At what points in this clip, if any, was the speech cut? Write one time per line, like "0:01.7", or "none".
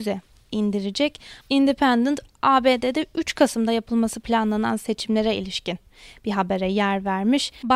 0:01.4